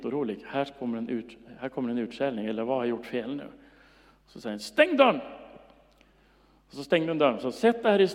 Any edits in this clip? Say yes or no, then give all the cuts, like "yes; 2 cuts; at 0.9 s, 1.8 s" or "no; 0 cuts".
no; 0 cuts